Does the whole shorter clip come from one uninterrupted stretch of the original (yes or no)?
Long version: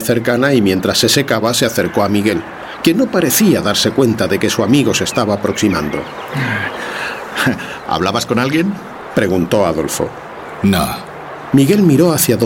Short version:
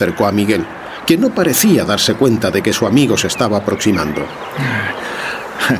yes